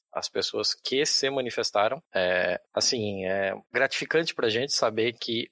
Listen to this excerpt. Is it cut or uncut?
uncut